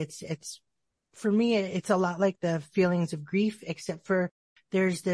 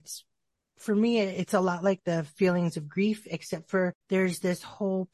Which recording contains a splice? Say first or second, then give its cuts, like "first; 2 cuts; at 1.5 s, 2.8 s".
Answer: second; 1 cut; at 4.0 s